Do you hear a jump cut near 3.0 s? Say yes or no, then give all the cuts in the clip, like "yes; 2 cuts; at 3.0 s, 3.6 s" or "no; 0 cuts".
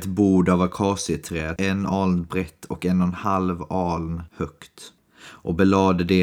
no; 1 cut; at 1.6 s